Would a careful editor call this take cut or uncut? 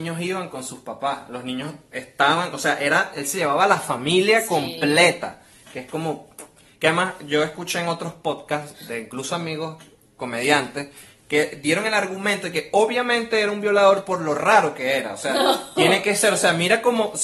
uncut